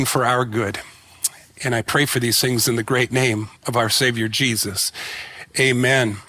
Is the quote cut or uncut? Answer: cut